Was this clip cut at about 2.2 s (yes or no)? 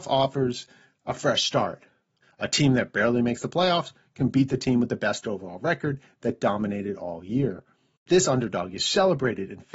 yes